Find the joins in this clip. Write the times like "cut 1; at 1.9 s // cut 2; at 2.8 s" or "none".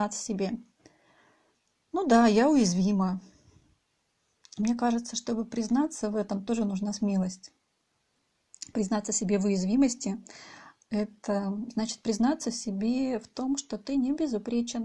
none